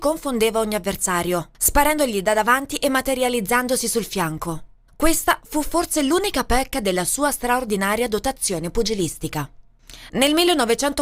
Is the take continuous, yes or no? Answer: no